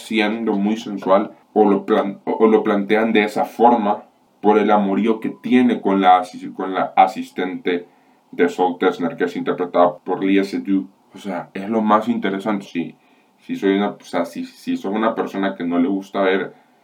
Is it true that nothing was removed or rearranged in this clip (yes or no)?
no